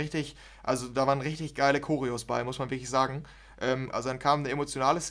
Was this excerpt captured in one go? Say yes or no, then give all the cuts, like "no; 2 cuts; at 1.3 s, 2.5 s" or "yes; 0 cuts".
no; 1 cut; at 3.9 s